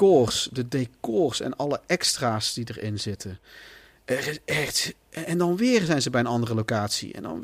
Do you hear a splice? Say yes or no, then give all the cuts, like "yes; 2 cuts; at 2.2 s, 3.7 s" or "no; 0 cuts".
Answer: no; 0 cuts